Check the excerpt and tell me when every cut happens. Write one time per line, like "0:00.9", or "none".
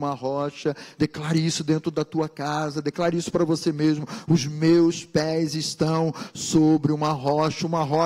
none